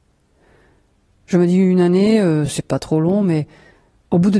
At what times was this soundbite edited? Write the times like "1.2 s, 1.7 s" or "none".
none